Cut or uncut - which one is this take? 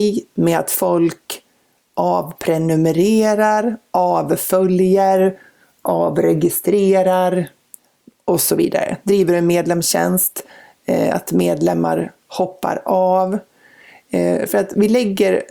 uncut